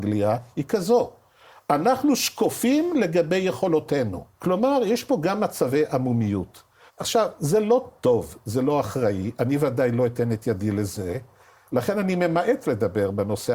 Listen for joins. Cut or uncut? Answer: cut